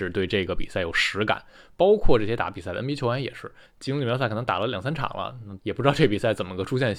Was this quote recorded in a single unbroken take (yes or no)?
no